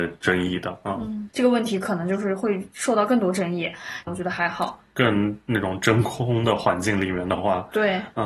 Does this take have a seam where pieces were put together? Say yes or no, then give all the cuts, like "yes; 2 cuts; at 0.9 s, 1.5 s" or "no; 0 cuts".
yes; 2 cuts; at 1.3 s, 4.1 s